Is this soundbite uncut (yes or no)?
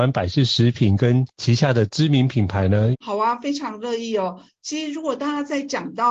no